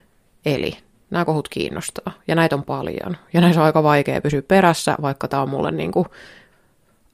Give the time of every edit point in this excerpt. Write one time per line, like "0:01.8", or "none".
none